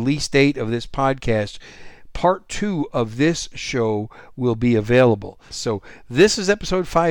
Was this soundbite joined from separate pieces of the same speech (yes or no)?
yes